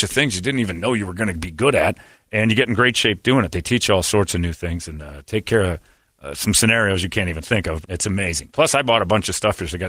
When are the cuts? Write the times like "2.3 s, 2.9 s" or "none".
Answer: 7.8 s